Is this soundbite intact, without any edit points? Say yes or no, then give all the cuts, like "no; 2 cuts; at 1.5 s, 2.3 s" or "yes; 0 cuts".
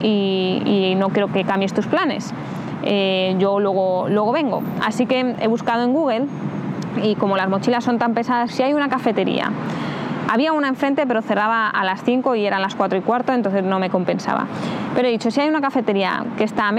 no; 1 cut; at 8.5 s